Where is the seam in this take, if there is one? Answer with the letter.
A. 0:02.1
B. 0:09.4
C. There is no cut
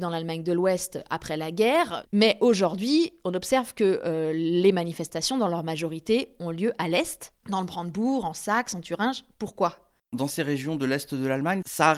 A